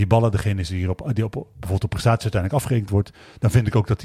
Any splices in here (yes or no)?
no